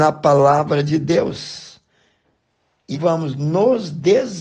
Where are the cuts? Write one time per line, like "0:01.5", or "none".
0:02.9